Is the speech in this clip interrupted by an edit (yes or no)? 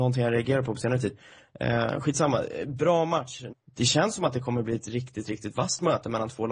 yes